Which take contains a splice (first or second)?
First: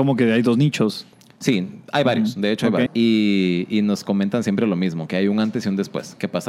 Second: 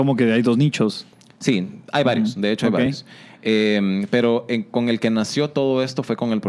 first